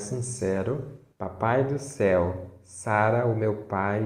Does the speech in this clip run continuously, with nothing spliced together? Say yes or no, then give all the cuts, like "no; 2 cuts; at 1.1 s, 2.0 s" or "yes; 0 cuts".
no; 1 cut; at 1.1 s